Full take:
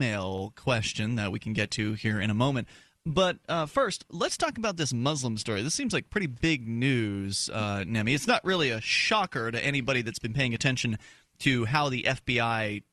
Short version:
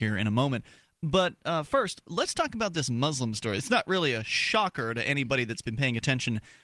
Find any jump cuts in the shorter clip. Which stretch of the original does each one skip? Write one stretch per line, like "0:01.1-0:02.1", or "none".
0:05.6-0:08.2